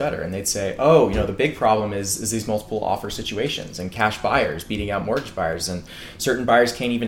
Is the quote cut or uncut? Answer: uncut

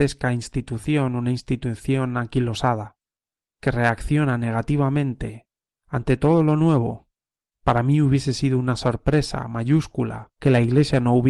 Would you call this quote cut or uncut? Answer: cut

